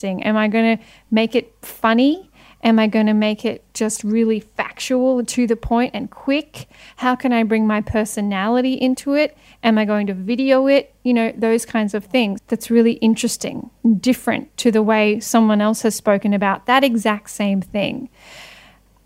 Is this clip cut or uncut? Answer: cut